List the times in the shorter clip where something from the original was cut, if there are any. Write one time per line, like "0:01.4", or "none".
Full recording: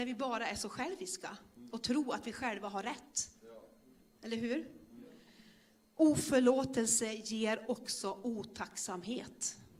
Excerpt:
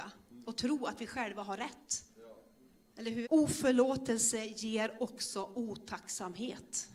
0:03.2